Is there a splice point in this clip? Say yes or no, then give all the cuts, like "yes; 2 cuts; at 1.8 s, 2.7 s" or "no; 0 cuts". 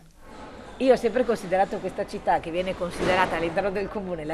no; 0 cuts